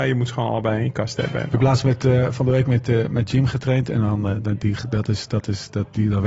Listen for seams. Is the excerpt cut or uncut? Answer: uncut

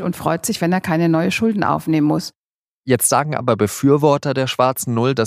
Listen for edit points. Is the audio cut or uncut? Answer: uncut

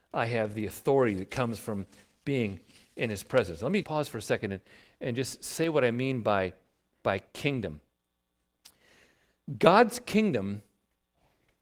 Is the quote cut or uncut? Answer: cut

